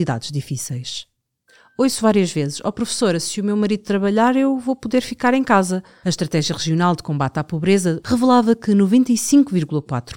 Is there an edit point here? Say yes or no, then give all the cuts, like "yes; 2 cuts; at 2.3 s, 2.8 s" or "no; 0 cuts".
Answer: yes; 2 cuts; at 6.0 s, 8.0 s